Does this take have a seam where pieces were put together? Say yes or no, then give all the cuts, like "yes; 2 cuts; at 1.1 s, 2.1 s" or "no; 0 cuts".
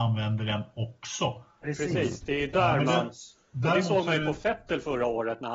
yes; 1 cut; at 1.6 s